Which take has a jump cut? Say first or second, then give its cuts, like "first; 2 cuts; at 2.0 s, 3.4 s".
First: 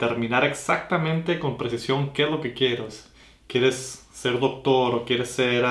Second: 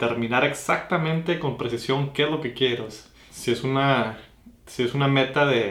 second; 1 cut; at 3.3 s